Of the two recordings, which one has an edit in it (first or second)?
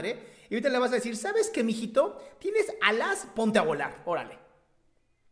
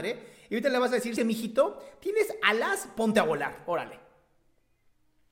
second